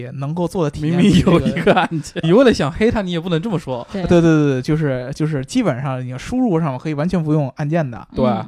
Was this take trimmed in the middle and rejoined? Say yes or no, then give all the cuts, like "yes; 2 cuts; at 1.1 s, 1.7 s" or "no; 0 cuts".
yes; 1 cut; at 2.2 s